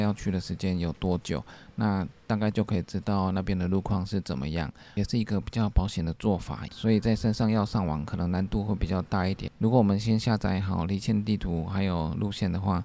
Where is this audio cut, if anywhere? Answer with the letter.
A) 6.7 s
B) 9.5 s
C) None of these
A